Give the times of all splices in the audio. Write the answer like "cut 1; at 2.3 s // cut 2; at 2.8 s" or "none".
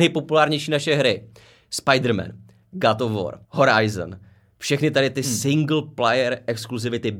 cut 1; at 3.4 s

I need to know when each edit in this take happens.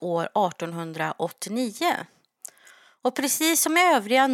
none

